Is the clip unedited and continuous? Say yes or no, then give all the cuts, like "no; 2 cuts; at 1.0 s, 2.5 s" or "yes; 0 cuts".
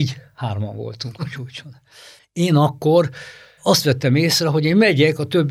no; 1 cut; at 2.2 s